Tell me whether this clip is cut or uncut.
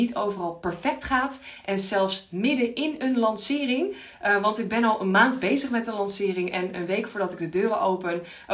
uncut